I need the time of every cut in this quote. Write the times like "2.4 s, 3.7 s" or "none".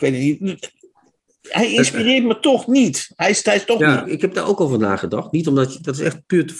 4.0 s